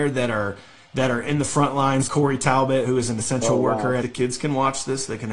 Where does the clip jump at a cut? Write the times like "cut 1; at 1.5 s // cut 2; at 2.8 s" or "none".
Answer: cut 1; at 2.1 s // cut 2; at 4.0 s